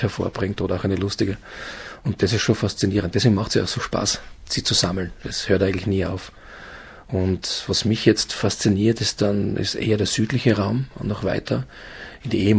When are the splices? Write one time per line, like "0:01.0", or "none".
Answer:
none